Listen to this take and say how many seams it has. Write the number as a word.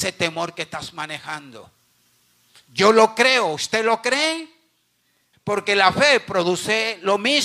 one